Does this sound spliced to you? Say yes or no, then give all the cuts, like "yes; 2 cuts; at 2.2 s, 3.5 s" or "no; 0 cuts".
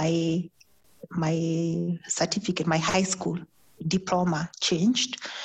no; 0 cuts